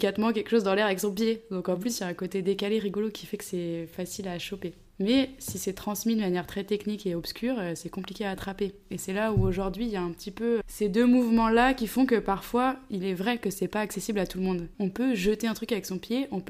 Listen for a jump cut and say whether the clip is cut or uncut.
cut